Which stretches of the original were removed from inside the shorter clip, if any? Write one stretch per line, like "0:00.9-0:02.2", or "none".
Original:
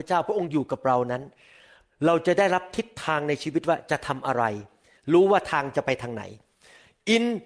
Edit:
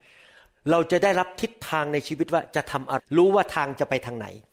0:04.3-0:05.0